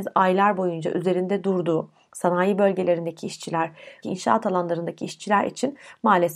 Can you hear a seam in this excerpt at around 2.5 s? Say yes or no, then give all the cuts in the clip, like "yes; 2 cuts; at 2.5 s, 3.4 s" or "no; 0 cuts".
no; 1 cut; at 4.0 s